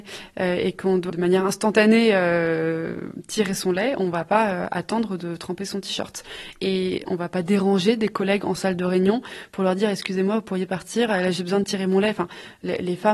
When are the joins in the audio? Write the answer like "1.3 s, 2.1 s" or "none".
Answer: 1.1 s

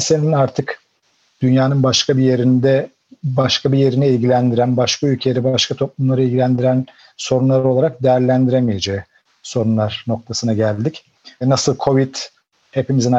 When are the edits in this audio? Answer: none

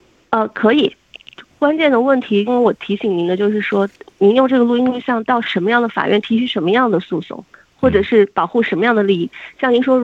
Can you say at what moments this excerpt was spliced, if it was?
2.5 s

